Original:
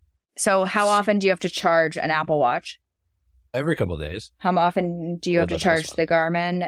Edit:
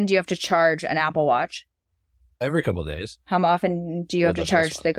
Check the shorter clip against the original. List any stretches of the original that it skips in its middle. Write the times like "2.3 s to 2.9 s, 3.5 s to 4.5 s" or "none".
none